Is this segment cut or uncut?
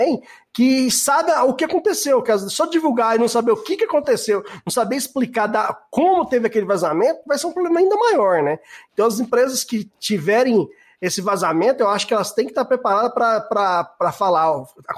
uncut